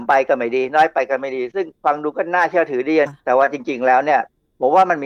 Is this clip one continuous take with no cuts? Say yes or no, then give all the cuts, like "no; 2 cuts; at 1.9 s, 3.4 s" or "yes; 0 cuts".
no; 1 cut; at 3.1 s